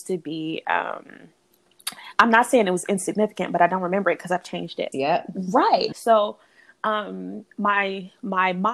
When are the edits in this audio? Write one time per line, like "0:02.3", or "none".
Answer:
0:04.9
0:05.9